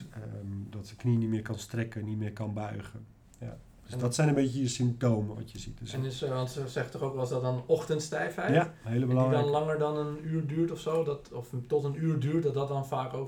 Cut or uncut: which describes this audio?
uncut